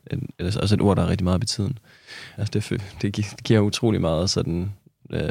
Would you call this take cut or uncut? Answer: cut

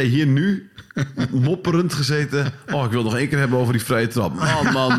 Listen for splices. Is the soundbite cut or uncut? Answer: uncut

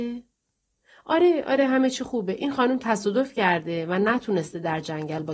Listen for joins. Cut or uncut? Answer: uncut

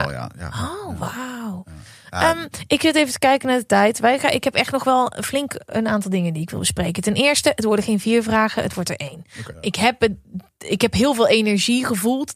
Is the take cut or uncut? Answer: cut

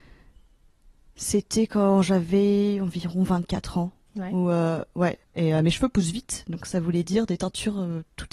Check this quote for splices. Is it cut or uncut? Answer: cut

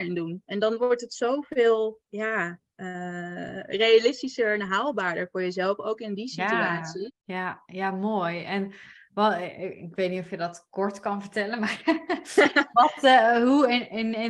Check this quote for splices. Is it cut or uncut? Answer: cut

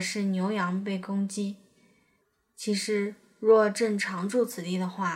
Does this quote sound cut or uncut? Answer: uncut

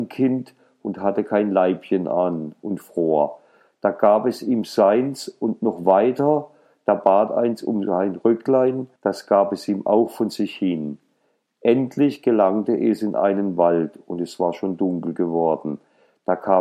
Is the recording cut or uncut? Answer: cut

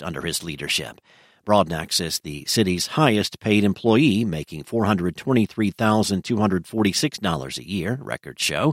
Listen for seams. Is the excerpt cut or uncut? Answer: uncut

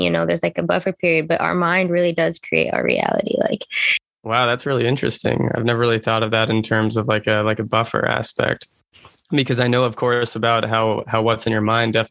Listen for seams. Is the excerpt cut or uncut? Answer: uncut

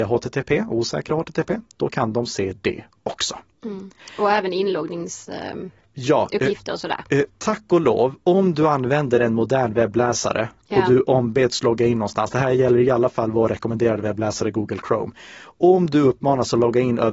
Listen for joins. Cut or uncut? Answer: uncut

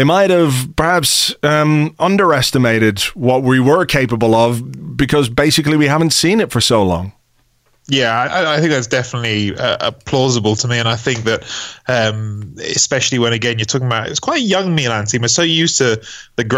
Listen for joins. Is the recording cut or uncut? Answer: uncut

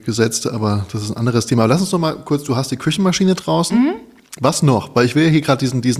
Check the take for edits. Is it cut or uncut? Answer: uncut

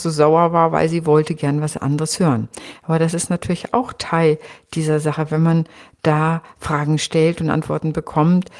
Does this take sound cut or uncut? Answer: uncut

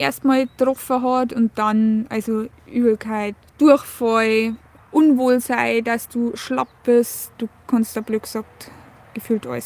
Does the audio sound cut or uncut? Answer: cut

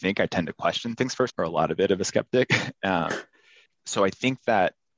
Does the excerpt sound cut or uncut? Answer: cut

